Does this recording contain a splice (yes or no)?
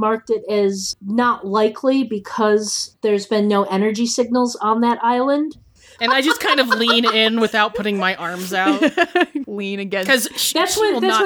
yes